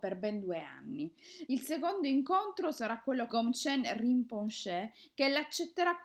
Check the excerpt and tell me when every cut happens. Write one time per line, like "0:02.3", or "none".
0:01.5
0:03.3